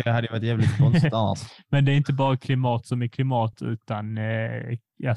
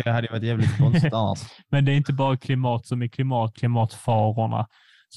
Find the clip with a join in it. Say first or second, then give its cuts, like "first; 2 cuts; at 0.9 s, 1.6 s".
second; 1 cut; at 3.5 s